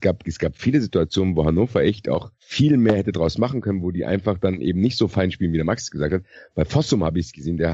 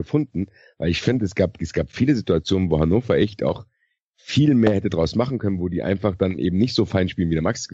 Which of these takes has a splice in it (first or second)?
first